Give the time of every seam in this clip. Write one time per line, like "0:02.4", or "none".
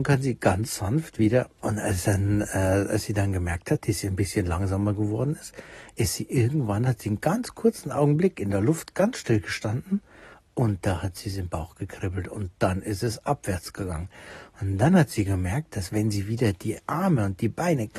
0:01.6